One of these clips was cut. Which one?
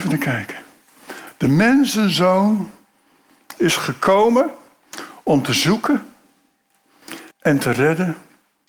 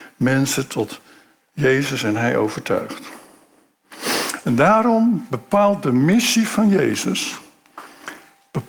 first; 2 cuts; at 3.6 s, 7.3 s

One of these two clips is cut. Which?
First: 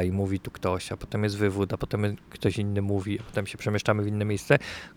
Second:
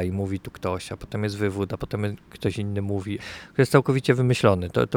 second; 1 cut; at 3.2 s

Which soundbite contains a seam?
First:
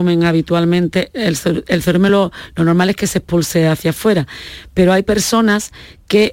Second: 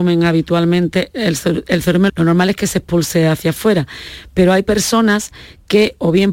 second; 1 cut; at 2.1 s

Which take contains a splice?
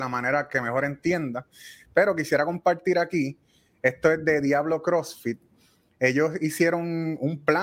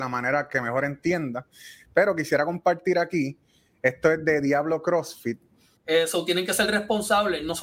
second; 1 cut; at 5.8 s

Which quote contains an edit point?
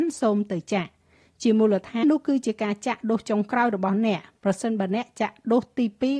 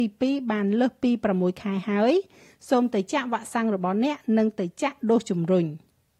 first; 1 cut; at 2.0 s

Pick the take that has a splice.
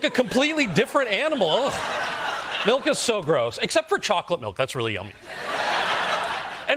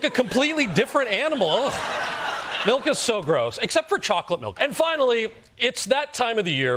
second; 1 cut; at 4.6 s

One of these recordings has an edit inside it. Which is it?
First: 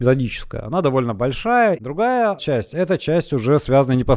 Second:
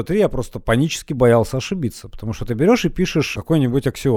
first; 1 cut; at 1.8 s

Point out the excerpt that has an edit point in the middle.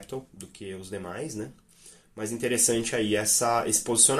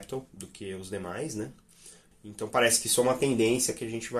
second; 1 cut; at 2.1 s

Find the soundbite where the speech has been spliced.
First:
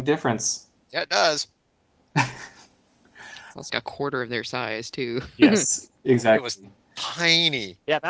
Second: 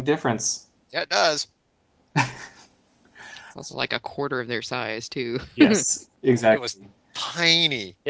first; 1 cut; at 3.7 s

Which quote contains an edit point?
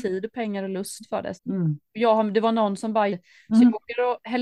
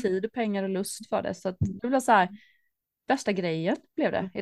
first; 2 cuts; at 1.4 s, 3.1 s

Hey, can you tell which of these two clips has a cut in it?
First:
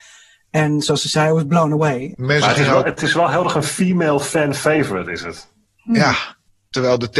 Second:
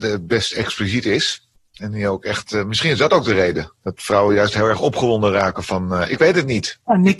first; 1 cut; at 2.1 s

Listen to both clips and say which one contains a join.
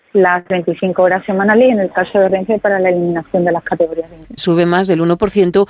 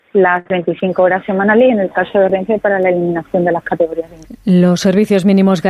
first; 1 cut; at 4.4 s

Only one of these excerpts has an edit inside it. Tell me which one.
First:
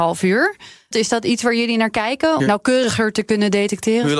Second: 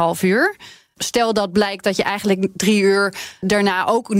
first; 2 cuts; at 0.9 s, 2.4 s

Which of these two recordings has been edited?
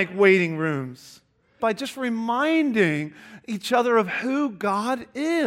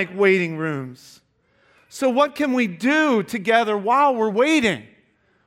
first; 1 cut; at 1.6 s

